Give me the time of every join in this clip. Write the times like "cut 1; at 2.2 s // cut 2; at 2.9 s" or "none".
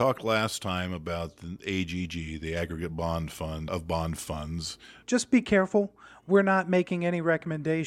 cut 1; at 3.7 s // cut 2; at 5.0 s